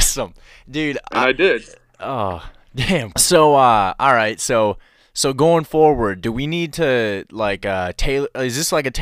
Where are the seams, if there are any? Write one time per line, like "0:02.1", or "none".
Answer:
0:03.1